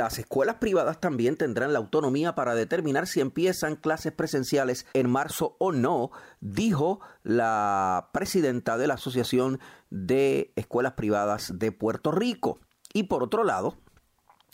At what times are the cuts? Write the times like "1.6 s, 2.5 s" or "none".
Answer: 4.9 s